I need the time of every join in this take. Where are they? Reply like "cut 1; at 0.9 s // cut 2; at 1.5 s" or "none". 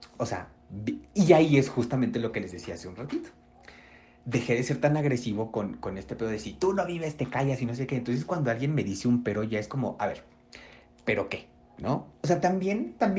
none